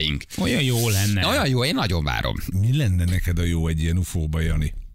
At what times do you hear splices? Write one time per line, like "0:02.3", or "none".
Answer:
0:02.5